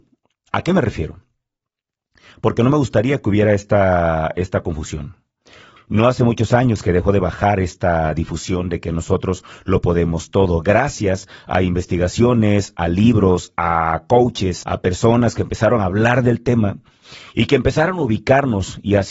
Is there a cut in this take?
yes; 2 cuts; at 5.8 s, 14.6 s

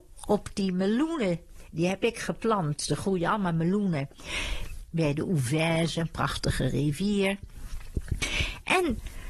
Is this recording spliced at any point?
yes; 1 cut; at 4.9 s

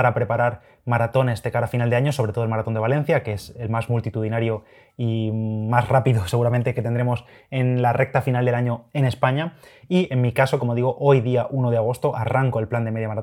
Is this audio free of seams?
yes; 0 cuts

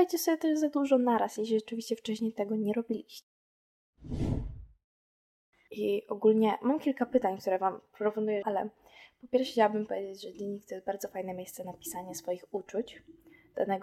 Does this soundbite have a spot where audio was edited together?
yes; 2 cuts; at 5.7 s, 8.4 s

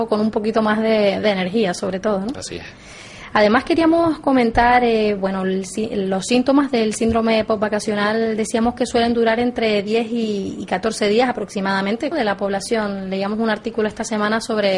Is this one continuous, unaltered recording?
no; 1 cut; at 12.1 s

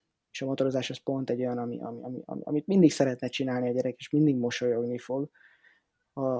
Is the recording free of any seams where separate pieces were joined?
yes; 0 cuts

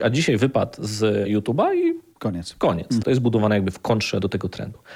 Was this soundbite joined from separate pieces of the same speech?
yes; 1 cut; at 3.0 s

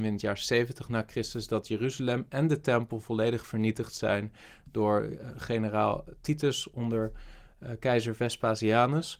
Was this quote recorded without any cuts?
yes; 0 cuts

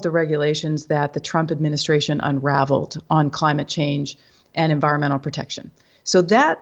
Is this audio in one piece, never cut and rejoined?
yes; 0 cuts

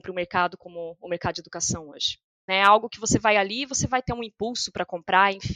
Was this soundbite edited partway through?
yes; 1 cut; at 2.5 s

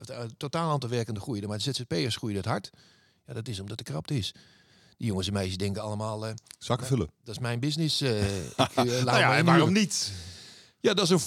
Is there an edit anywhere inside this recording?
no; 0 cuts

